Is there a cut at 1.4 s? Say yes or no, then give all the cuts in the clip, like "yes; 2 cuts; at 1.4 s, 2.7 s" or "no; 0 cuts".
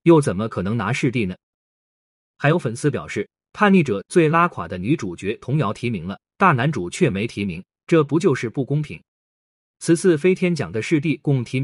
no; 1 cut; at 9.6 s